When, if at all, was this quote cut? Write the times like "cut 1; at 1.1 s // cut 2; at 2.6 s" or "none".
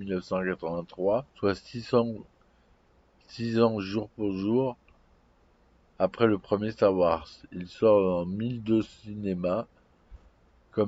cut 1; at 1.3 s

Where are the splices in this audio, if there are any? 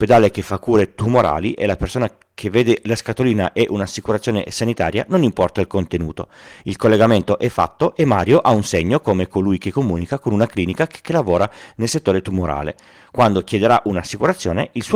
none

